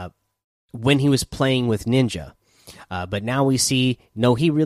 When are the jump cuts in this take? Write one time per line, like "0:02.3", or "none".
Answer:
none